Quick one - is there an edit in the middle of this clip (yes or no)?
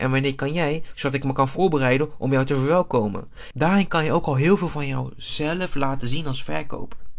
yes